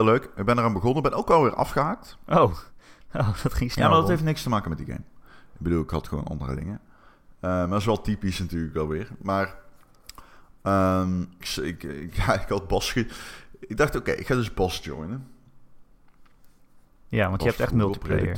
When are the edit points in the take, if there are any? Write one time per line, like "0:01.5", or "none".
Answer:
0:11.4